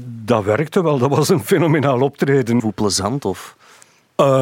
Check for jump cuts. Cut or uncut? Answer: cut